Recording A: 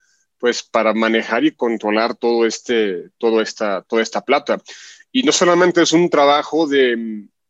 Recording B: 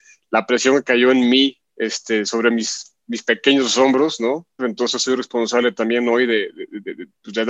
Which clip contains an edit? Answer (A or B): B